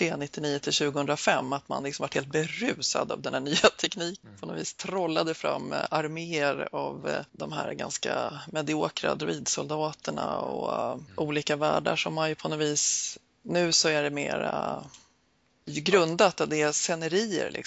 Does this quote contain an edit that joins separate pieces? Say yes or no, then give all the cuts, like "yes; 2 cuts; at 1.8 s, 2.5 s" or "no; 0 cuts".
no; 0 cuts